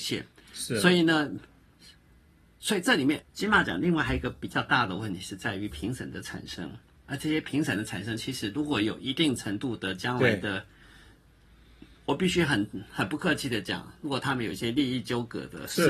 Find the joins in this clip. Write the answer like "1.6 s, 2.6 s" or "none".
3.2 s